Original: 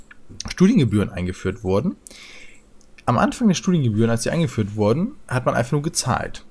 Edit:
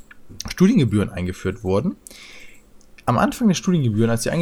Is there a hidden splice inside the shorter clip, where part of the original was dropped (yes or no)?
no